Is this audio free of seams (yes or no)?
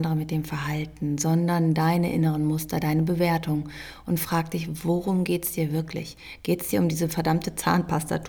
yes